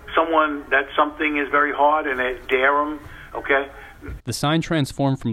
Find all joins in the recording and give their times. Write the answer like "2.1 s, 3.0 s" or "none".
2.4 s, 4.2 s